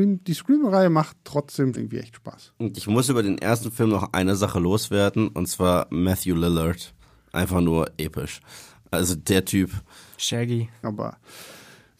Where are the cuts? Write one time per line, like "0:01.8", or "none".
0:01.7
0:10.8